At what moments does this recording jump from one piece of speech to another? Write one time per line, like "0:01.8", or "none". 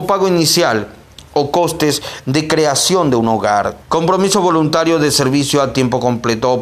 0:03.8

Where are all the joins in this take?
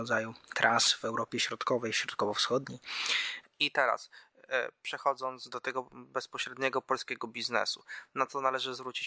0:03.4

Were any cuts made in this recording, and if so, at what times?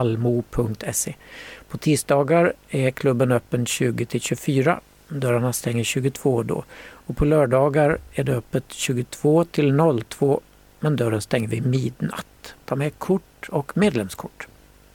0:12.5

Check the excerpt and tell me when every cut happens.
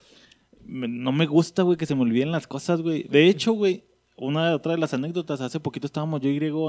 none

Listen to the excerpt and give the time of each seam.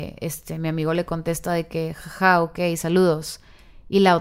none

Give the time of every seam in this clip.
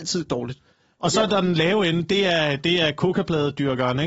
none

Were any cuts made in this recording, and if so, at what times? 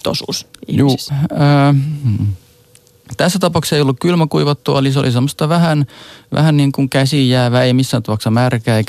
0:01.1

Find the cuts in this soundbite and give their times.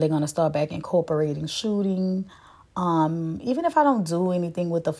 none

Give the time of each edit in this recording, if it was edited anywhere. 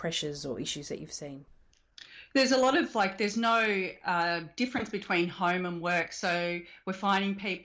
none

